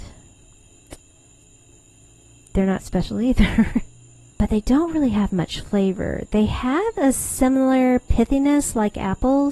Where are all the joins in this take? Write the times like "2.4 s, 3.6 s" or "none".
4.3 s

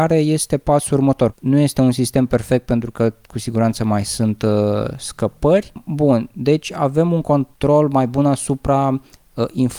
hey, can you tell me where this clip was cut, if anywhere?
1.3 s

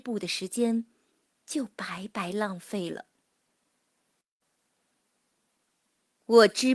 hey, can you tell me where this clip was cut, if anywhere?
none

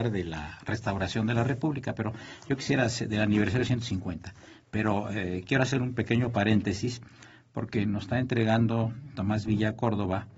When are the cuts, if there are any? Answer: 9.1 s

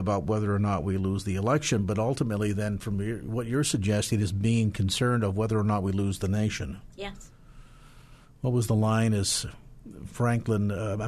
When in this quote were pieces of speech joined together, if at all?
none

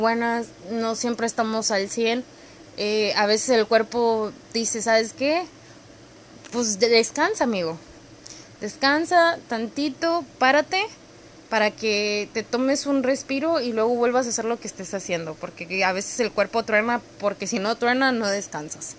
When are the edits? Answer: none

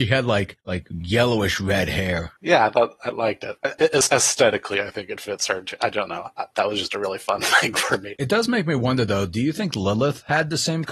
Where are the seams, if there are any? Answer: 8.2 s

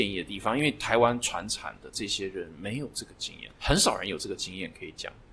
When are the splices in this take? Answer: 3.6 s

